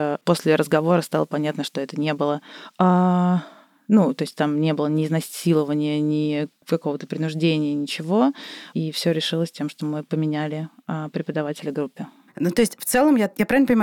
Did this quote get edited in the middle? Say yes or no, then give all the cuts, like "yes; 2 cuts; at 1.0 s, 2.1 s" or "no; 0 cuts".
no; 0 cuts